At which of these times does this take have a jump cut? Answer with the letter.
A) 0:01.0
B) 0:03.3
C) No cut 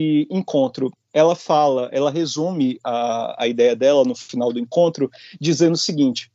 C